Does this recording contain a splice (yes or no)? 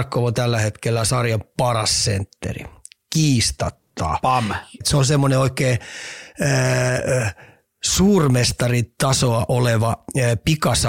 yes